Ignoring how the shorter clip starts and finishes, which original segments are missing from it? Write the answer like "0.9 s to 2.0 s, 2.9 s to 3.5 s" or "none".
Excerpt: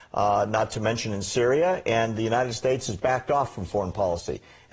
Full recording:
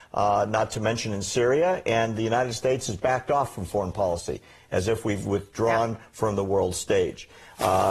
none